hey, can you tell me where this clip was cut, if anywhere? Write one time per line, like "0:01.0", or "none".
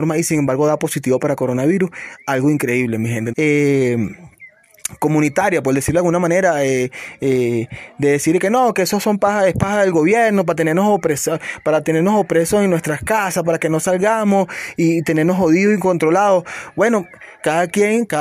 0:03.3